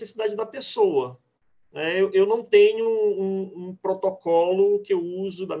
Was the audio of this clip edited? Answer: no; 0 cuts

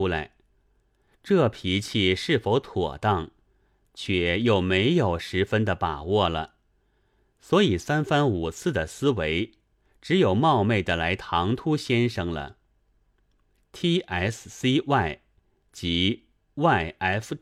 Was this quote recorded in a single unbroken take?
no; 1 cut; at 13.6 s

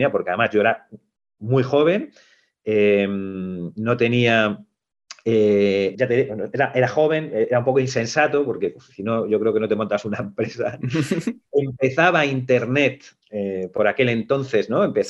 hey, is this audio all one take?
no; 1 cut; at 5.9 s

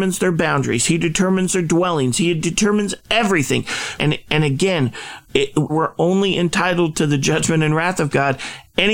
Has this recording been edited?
yes; 2 cuts; at 4.0 s, 5.7 s

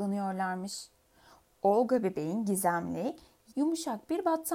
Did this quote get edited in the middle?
yes; 1 cut; at 3.5 s

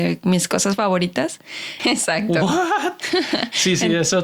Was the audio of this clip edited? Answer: yes; 1 cut; at 1.8 s

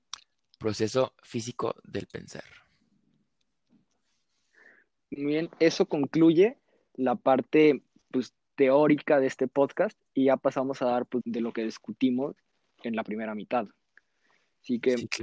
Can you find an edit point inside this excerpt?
yes; 1 cut; at 11.2 s

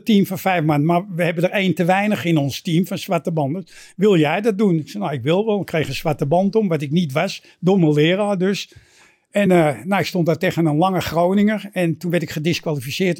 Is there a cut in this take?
no; 0 cuts

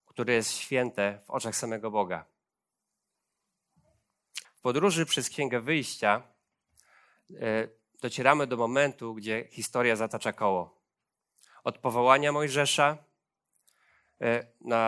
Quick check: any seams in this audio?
yes; 1 cut; at 4.4 s

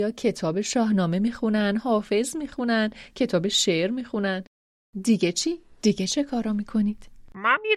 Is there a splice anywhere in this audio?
no; 0 cuts

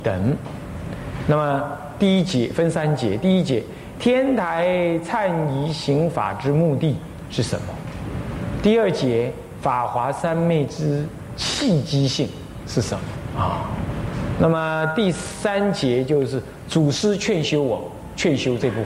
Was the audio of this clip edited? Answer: yes; 1 cut; at 13.3 s

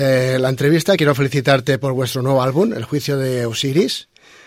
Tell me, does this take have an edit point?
no; 0 cuts

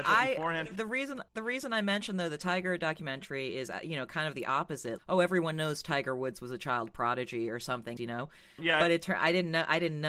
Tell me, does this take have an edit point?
yes; 3 cuts; at 1.3 s, 5.0 s, 8.0 s

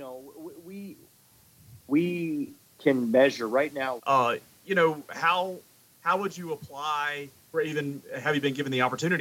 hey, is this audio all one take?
no; 2 cuts; at 4.0 s, 7.5 s

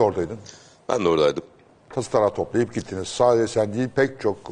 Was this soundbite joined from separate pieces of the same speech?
no; 0 cuts

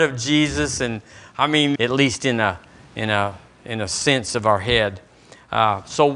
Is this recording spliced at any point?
yes; 1 cut; at 1.8 s

